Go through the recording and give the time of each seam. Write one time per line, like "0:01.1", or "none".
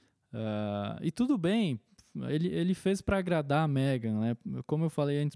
none

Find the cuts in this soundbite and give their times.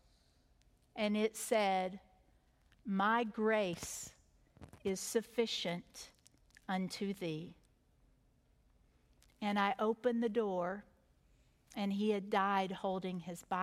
none

